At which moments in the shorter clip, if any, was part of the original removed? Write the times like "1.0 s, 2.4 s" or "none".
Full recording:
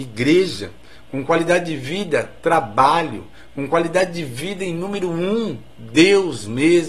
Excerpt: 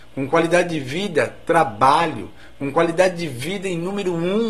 none

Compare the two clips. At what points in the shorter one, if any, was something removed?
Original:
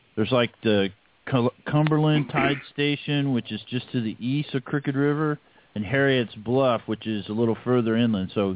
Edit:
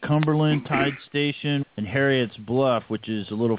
1.6 s

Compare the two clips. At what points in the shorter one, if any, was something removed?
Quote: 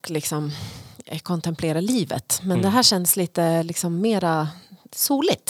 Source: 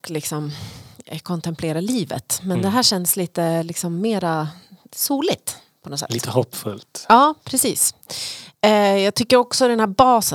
none

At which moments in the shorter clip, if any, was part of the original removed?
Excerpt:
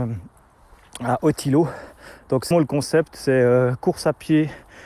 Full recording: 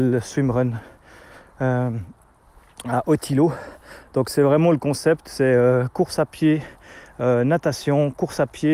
2.5 s

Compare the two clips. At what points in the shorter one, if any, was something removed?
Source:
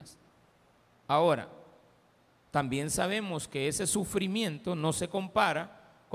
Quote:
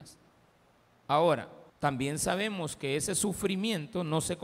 1.7 s

